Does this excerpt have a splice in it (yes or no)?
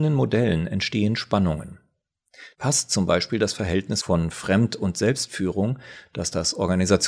yes